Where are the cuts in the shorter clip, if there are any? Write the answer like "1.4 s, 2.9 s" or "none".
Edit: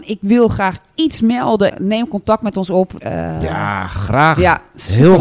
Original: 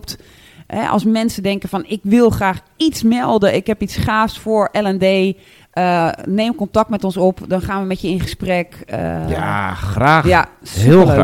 1.7 s, 3.0 s